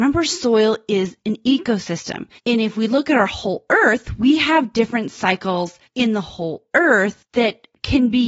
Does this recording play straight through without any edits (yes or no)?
yes